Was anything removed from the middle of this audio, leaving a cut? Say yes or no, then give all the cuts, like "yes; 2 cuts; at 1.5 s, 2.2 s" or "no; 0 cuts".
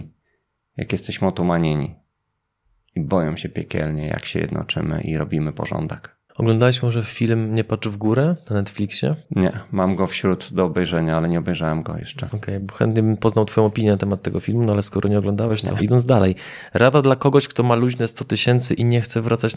yes; 1 cut; at 15.8 s